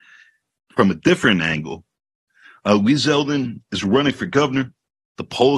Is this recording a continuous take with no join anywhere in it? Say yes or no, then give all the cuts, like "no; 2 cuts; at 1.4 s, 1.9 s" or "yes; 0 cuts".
yes; 0 cuts